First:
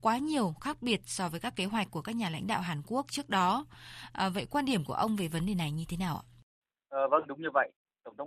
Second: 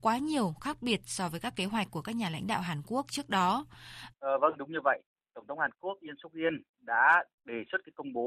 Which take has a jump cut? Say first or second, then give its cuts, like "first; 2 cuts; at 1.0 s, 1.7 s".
second; 1 cut; at 4.1 s